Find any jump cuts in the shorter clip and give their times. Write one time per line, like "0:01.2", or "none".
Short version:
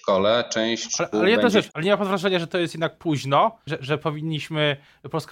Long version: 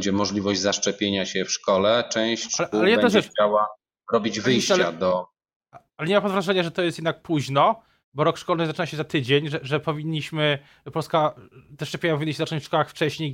0:01.7
0:03.7